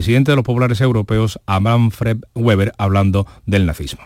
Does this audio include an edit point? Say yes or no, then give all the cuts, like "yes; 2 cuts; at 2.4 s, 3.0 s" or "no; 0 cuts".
no; 0 cuts